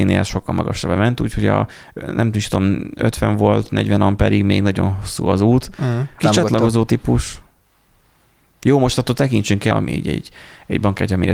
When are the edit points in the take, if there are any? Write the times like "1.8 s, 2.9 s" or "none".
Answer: 6.2 s, 9.7 s